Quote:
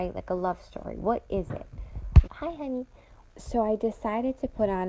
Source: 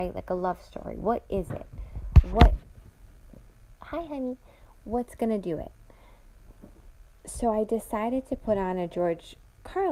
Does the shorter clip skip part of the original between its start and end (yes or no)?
yes